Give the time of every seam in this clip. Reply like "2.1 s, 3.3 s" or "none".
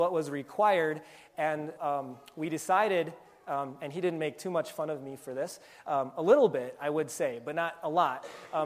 1.8 s